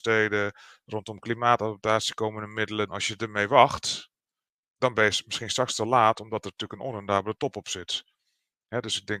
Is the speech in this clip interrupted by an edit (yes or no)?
yes